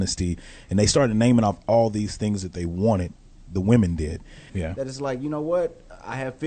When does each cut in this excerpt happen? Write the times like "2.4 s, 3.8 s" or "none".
4.5 s